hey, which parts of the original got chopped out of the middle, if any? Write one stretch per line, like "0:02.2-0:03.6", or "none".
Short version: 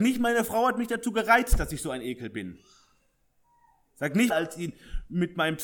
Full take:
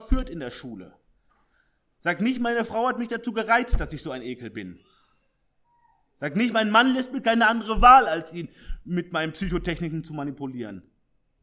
0:06.5-0:08.1